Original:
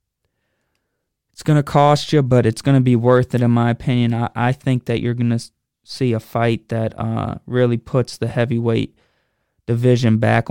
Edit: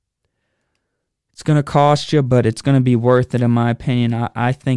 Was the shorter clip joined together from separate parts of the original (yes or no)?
no